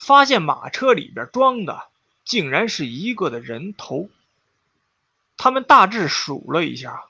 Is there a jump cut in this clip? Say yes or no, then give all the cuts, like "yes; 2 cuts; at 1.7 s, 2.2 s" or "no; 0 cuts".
yes; 1 cut; at 3.2 s